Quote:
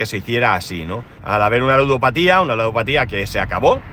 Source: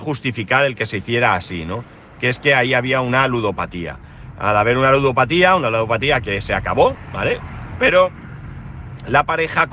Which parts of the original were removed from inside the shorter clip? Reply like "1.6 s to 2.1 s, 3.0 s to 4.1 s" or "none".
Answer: 2.0 s to 4.3 s